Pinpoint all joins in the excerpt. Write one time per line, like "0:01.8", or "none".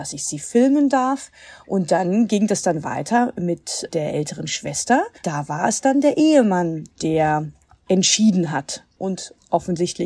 0:05.2